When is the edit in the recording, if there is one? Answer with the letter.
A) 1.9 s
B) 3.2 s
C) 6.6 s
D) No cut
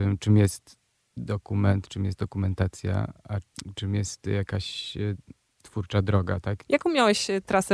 C